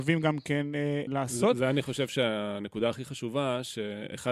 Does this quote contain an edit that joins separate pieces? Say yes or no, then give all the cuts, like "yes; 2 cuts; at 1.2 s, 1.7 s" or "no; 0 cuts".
yes; 1 cut; at 1.1 s